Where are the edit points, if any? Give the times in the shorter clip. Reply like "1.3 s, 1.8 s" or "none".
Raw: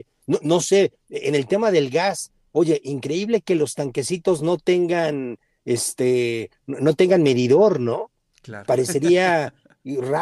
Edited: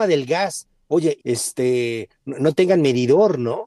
1.2 s